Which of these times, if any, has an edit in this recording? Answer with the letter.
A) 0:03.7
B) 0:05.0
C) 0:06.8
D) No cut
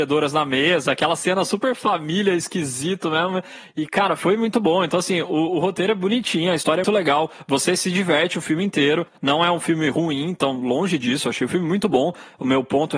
C